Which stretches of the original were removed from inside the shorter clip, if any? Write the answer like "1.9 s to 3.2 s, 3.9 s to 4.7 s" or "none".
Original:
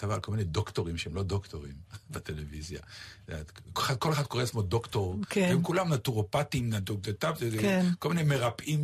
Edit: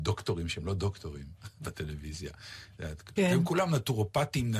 3.6 s to 5.3 s